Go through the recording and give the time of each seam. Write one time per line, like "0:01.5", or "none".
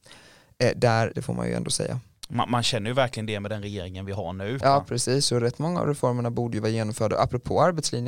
0:01.1
0:04.6